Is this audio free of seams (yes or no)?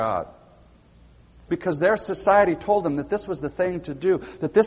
no